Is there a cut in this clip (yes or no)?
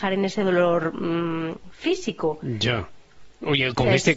no